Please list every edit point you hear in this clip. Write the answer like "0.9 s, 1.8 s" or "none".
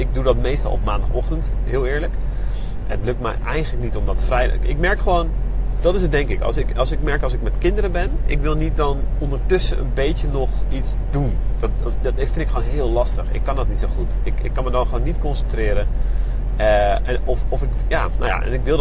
none